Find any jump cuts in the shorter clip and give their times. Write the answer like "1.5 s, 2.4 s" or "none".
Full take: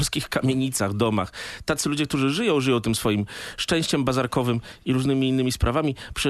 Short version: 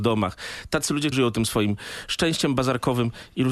1.1 s